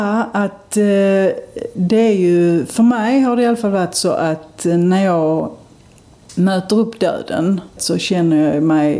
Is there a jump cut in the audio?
yes; 1 cut; at 7.8 s

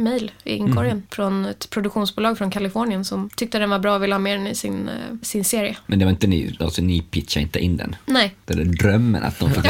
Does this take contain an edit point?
no; 0 cuts

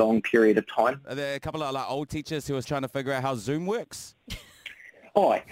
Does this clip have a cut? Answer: yes; 2 cuts; at 1.0 s, 2.6 s

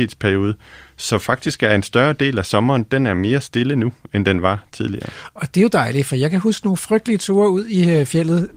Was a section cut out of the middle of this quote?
no; 0 cuts

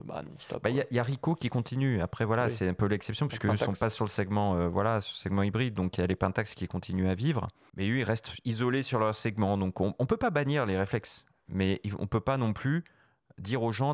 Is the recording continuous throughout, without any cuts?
no; 1 cut; at 7.7 s

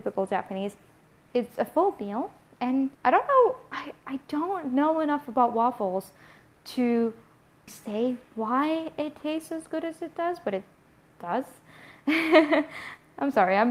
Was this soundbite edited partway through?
yes; 3 cuts; at 1.3 s, 2.9 s, 7.7 s

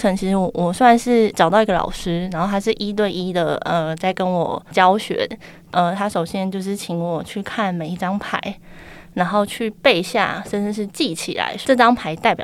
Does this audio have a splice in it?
no; 0 cuts

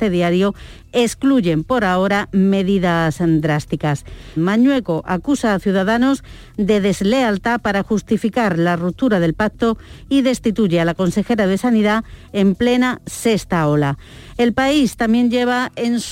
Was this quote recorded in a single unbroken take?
no; 1 cut; at 4.4 s

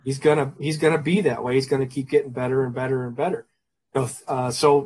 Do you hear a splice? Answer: no; 0 cuts

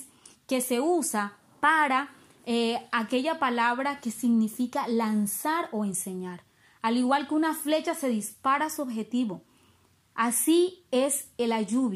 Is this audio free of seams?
yes; 0 cuts

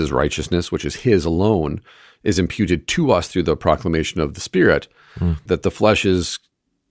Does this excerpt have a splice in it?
yes; 1 cut; at 5.5 s

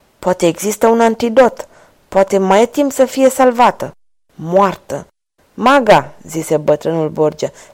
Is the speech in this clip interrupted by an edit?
yes; 1 cut; at 5.4 s

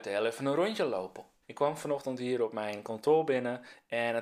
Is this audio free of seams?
no; 1 cut; at 1.4 s

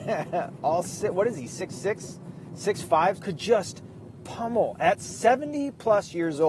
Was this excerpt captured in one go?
no; 1 cut; at 3.2 s

